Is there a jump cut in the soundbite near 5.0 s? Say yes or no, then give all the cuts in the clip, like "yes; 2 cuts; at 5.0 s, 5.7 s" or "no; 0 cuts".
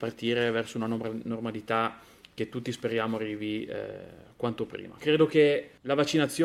yes; 1 cut; at 5.0 s